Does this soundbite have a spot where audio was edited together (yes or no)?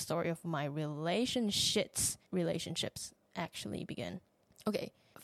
yes